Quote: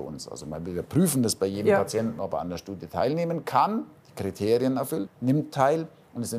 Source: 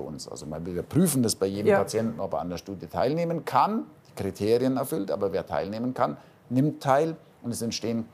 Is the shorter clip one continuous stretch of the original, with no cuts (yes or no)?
no